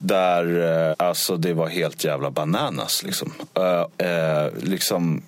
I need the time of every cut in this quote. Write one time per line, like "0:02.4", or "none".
0:00.9
0:03.9